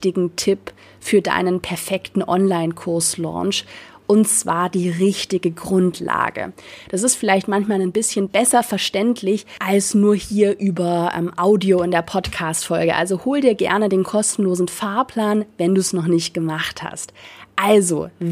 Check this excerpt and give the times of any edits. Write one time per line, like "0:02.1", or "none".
0:06.9